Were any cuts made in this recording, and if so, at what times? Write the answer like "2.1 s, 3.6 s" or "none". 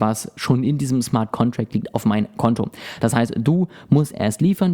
none